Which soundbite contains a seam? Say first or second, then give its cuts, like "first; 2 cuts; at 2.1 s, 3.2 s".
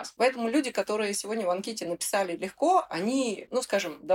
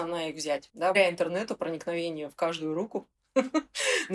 second; 1 cut; at 0.9 s